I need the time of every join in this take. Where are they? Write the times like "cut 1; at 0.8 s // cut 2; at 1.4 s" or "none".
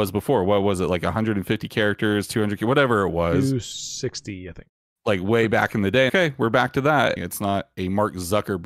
cut 1; at 6.1 s // cut 2; at 7.2 s